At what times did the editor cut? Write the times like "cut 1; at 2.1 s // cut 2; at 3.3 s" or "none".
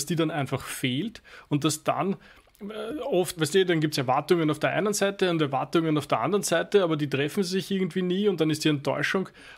cut 1; at 3.4 s